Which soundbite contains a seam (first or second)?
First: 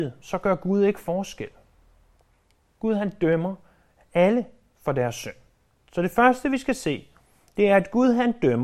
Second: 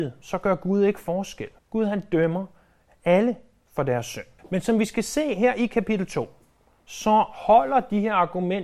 second